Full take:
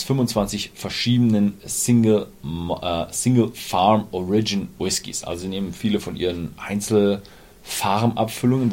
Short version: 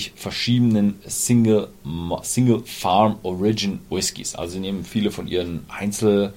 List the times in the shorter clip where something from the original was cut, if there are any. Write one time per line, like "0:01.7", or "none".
0:02.2

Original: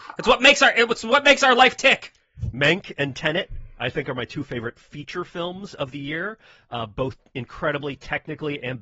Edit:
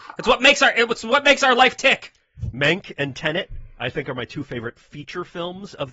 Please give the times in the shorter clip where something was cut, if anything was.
none

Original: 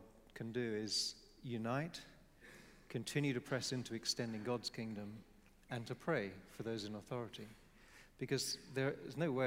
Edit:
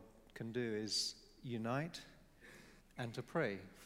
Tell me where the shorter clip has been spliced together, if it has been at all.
0:02.8

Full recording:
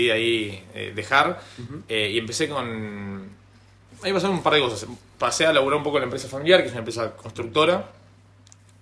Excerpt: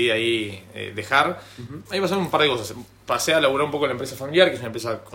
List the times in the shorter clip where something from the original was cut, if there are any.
0:01.8

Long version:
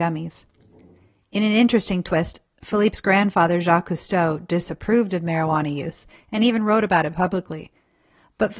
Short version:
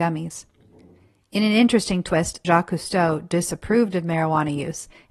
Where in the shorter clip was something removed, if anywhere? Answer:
0:02.4

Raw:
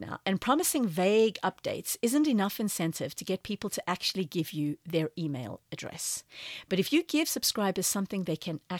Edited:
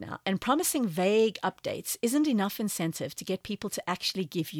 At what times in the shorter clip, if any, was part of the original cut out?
none

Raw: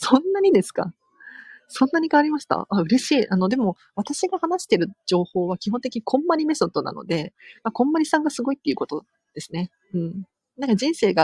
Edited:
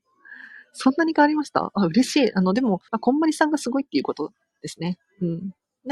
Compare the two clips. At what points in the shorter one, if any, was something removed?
0:02.9

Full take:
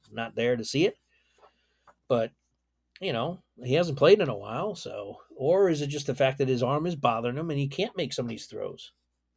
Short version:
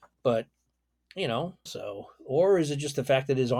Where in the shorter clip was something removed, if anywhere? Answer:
0:01.7

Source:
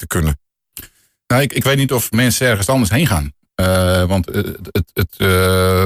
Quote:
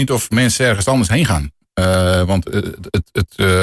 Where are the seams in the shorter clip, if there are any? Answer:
none

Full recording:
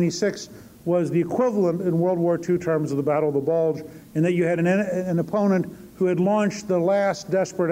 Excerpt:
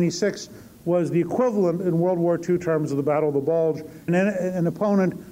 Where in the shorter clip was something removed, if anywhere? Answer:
0:04.1

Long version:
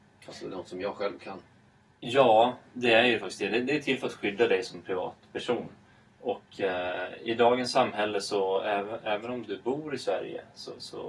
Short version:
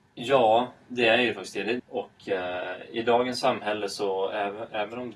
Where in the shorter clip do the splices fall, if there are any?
0:01.8

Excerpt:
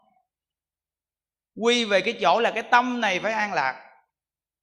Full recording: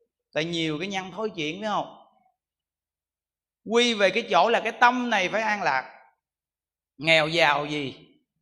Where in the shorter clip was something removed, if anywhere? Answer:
none

